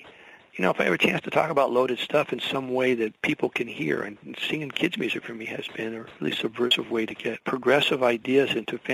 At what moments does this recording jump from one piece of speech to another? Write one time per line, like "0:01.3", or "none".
none